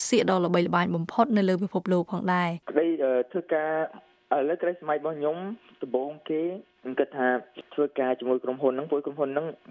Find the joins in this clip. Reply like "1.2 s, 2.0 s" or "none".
2.6 s

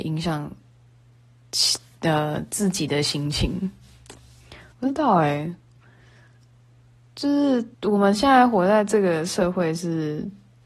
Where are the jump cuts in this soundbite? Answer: 4.7 s, 7.7 s

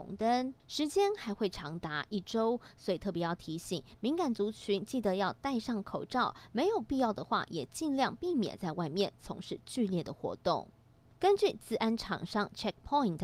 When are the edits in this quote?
none

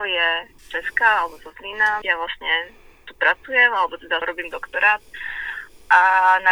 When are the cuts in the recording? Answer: 2.0 s

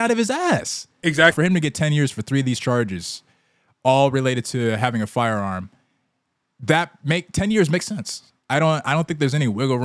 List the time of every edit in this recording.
1.3 s

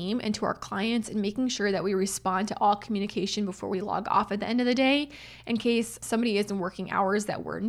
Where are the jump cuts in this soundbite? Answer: none

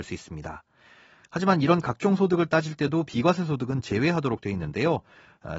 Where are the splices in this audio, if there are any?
1.2 s

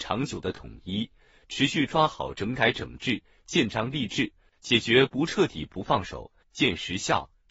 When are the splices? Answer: 4.5 s, 6.4 s

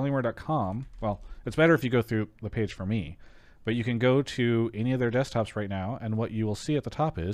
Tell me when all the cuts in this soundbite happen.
none

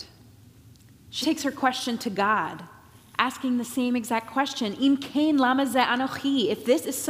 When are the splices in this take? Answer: 1.2 s

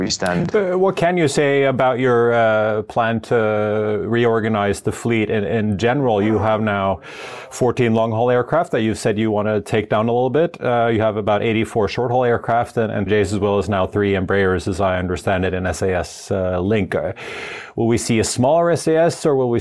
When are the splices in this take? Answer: 13.1 s

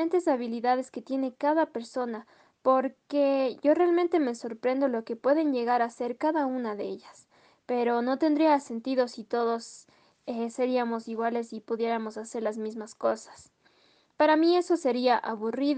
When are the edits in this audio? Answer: none

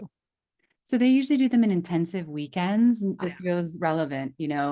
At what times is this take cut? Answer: 3.2 s

